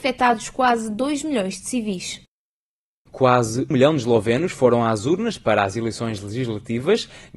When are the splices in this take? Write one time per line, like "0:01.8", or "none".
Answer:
0:03.7

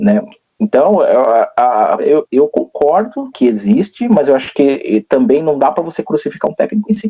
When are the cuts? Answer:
0:02.0
0:03.3

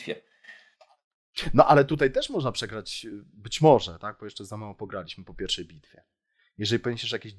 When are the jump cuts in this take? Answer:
none

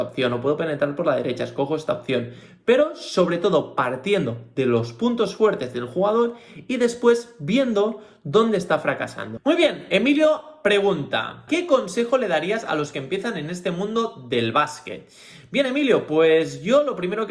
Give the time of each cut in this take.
0:09.4

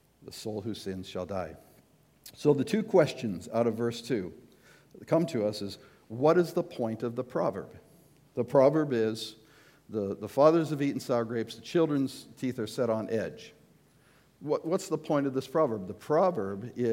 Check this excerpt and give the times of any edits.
none

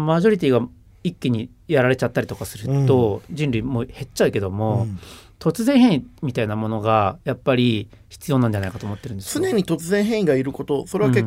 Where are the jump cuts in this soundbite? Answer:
none

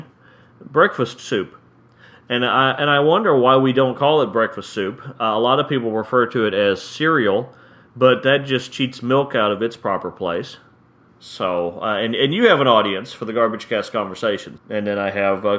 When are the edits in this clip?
0:11.1
0:14.6

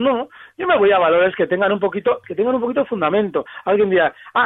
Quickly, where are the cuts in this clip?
0:02.2

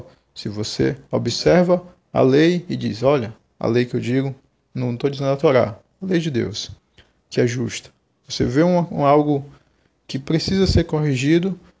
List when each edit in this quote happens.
none

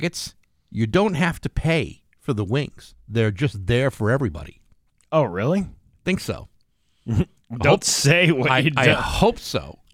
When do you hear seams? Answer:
none

